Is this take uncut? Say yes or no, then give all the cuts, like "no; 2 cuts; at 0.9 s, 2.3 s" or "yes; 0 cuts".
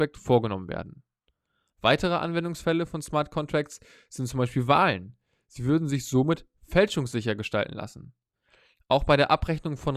no; 1 cut; at 1.7 s